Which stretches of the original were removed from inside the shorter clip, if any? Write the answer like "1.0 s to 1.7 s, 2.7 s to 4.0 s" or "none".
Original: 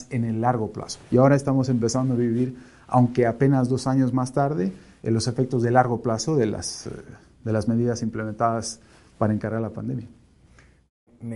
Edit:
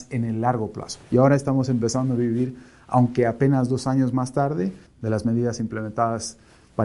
4.9 s to 7.3 s